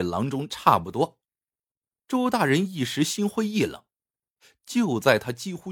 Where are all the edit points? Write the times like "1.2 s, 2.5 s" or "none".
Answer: none